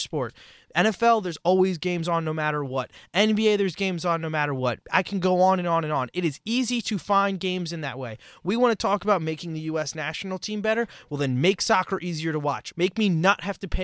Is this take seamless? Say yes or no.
no